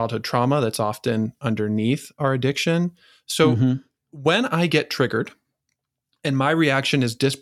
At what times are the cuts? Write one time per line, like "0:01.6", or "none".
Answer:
none